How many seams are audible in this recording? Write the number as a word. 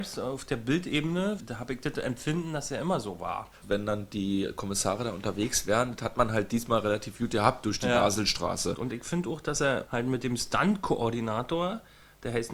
two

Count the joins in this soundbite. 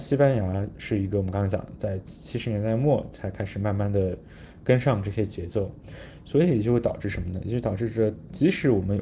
zero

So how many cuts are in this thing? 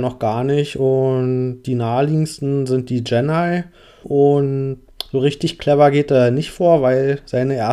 one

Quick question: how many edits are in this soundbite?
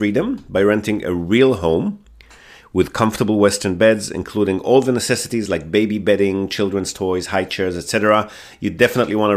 zero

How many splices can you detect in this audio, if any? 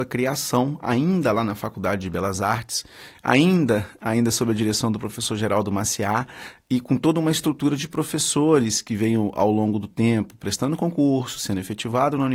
zero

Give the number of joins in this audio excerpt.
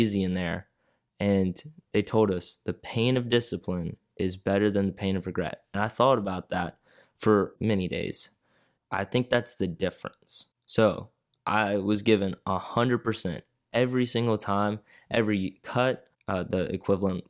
one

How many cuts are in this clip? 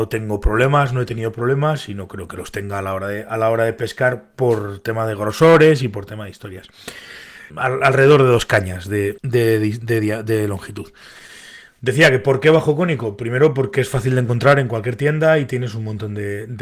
two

